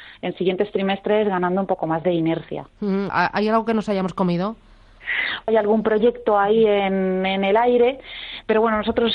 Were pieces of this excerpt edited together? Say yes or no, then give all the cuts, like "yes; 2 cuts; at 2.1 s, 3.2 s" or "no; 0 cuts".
yes; 2 cuts; at 3.1 s, 5.5 s